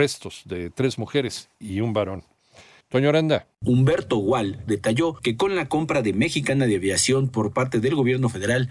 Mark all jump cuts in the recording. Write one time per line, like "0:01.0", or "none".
0:02.8
0:04.7